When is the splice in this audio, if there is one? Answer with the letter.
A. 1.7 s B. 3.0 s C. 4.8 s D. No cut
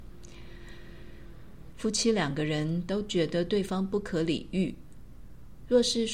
A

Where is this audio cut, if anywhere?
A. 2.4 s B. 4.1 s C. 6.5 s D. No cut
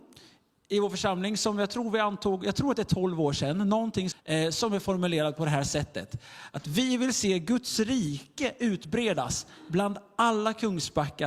B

